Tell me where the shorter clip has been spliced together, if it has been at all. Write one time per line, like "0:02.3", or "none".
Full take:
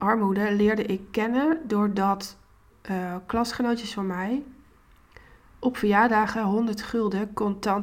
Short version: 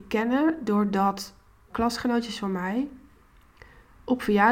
0:01.7